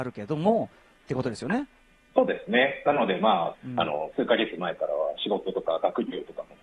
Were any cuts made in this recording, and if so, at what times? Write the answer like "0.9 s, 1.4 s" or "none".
3.5 s

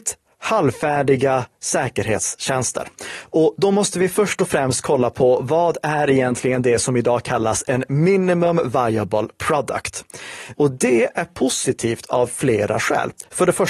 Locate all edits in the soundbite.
10.6 s

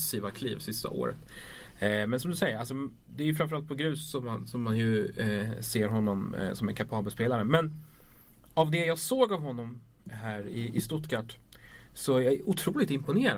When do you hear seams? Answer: none

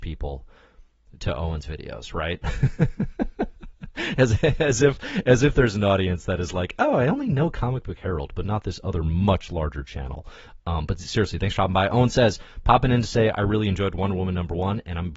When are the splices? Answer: none

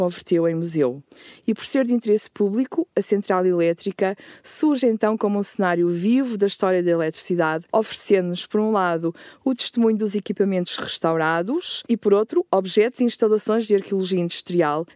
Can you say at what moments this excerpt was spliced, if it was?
none

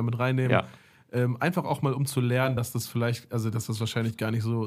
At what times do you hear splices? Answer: none

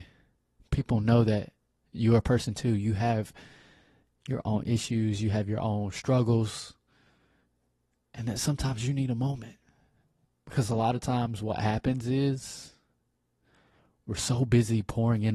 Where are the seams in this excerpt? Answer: 10.3 s

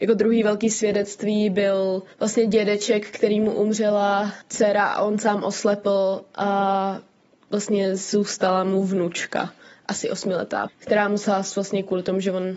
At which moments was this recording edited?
2.1 s, 10.7 s

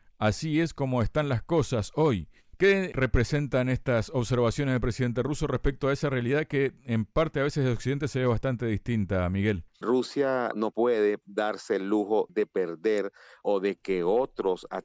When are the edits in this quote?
2.4 s, 9.7 s

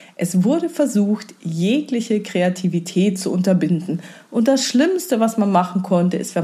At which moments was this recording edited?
none

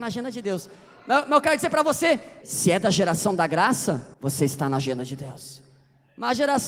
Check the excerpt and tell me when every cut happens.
2.4 s, 4.1 s

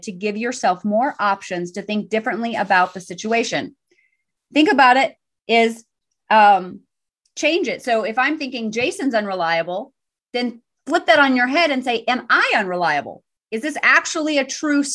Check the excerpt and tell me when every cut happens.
none

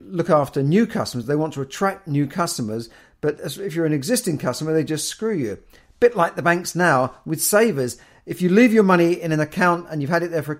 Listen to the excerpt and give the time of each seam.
none

